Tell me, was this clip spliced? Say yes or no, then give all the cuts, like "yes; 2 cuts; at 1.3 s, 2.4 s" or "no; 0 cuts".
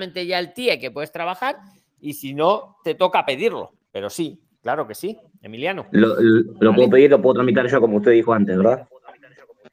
no; 0 cuts